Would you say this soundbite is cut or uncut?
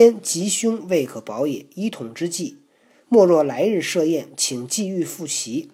uncut